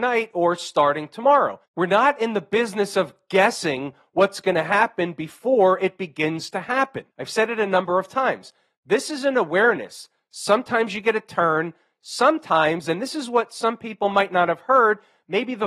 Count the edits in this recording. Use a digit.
2